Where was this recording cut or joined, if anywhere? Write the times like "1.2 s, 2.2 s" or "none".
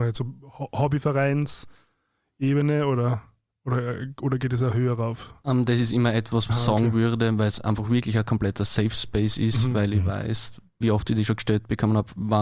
6.5 s, 10.8 s